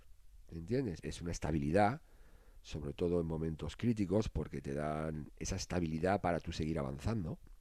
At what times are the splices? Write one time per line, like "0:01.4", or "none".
0:01.0